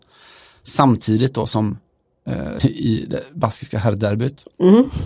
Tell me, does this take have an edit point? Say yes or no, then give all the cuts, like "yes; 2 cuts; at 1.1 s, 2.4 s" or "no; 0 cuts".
yes; 1 cut; at 2.6 s